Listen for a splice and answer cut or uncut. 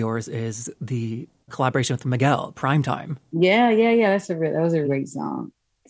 cut